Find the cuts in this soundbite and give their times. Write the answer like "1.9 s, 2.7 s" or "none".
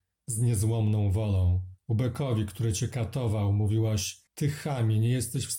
1.8 s, 4.3 s